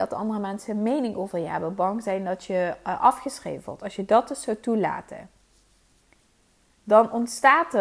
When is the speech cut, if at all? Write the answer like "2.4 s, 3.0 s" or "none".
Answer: none